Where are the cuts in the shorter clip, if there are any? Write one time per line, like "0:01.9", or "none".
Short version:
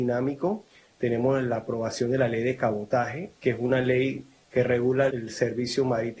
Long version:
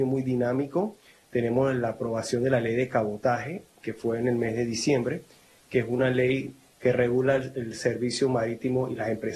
0:03.3
0:05.1